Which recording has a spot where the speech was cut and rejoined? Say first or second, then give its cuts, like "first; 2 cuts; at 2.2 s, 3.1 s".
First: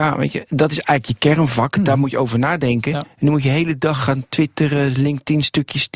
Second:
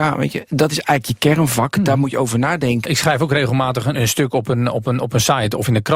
second; 2 cuts; at 2.8 s, 3.9 s